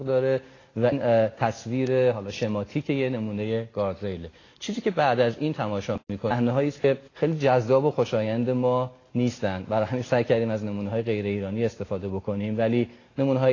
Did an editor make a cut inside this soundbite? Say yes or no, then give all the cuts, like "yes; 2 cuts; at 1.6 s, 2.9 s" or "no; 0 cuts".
yes; 1 cut; at 7.1 s